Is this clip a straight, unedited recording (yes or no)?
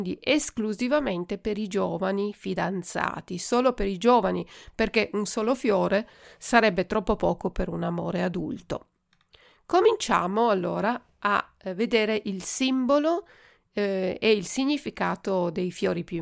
yes